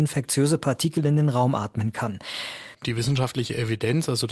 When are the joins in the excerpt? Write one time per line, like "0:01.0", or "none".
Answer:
0:02.7